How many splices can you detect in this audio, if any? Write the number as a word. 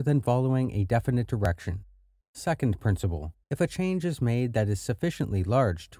two